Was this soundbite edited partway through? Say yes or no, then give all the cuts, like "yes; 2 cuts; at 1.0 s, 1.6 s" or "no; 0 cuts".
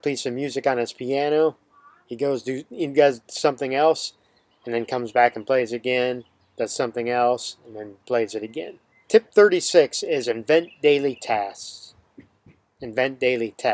yes; 1 cut; at 9.0 s